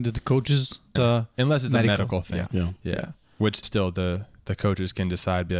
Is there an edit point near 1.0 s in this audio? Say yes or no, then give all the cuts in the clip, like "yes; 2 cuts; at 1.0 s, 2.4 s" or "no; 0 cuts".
yes; 2 cuts; at 1.0 s, 3.6 s